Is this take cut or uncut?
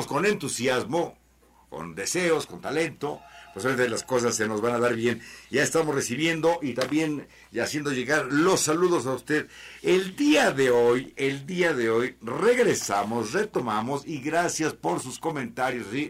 uncut